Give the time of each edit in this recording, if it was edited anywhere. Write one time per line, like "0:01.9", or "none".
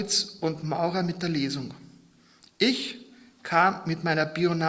none